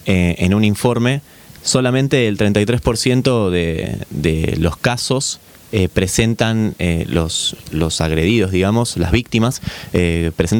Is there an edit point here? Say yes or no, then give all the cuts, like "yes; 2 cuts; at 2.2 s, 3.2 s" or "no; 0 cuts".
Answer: no; 0 cuts